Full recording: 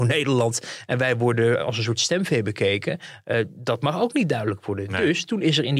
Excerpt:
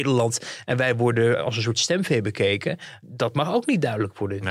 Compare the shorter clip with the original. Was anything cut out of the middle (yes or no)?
yes